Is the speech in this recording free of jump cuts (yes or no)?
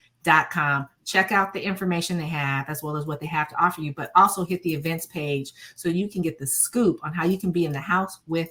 yes